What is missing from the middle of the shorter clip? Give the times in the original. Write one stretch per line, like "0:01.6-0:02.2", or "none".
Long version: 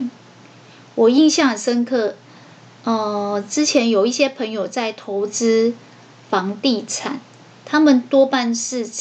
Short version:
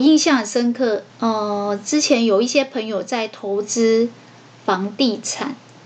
0:02.2-0:02.7

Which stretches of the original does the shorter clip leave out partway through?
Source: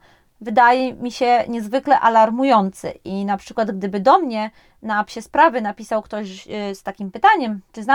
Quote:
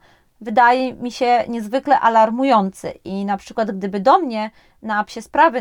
none

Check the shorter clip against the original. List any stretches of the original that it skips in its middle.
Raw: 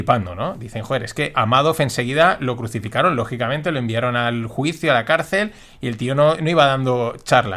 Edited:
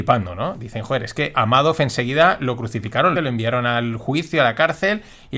0:03.2-0:03.7

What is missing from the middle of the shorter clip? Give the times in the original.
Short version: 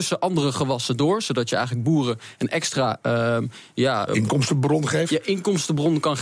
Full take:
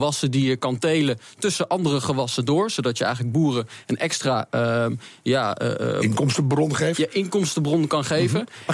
0:05.6-0:05.9

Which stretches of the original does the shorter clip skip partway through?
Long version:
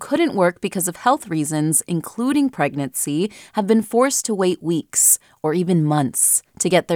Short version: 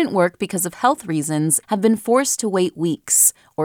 0:01.9-0:03.5

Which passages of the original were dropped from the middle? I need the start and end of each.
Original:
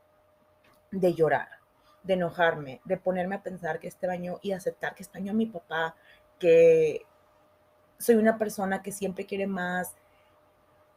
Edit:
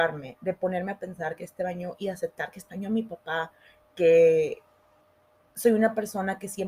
none

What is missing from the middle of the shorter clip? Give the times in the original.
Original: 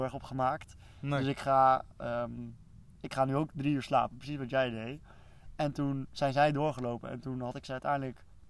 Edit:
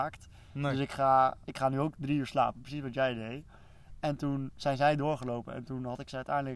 0:01.9-0:03.0

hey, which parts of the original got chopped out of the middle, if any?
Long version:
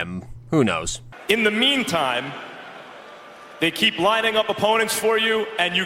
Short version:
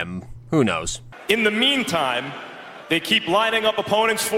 0:02.8-0:03.5

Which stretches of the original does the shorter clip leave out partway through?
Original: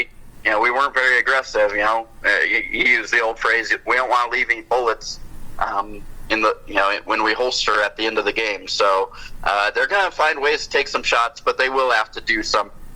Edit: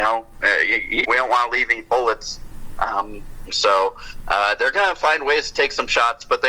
0:02.8-0:03.8
0:06.3-0:08.6

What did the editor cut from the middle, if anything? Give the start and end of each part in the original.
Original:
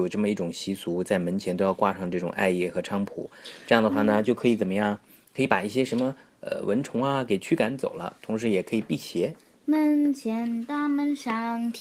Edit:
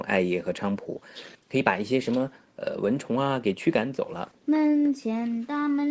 0:03.6-0:05.2
0:08.2-0:09.5

